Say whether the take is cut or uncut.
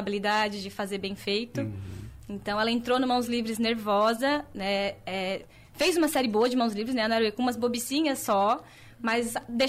uncut